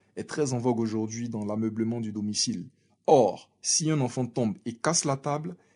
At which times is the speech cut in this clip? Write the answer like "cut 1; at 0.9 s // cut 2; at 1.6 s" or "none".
none